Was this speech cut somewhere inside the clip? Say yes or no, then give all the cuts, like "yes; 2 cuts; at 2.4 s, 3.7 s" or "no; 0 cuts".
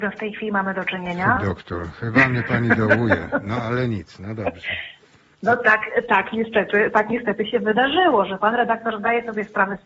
yes; 1 cut; at 1.4 s